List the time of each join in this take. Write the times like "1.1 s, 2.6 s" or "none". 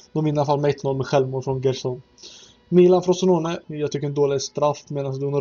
3.6 s